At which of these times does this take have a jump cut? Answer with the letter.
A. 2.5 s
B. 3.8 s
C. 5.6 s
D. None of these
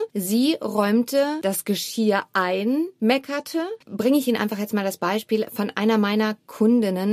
B